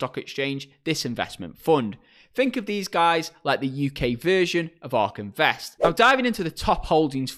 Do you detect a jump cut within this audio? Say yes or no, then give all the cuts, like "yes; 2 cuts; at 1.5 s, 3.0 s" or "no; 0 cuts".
yes; 1 cut; at 5.8 s